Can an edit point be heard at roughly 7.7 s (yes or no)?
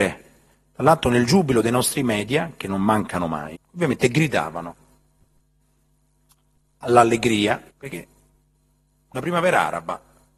yes